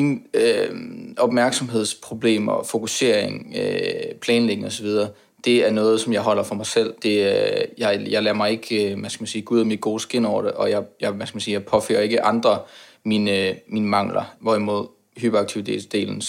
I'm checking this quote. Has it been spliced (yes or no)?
yes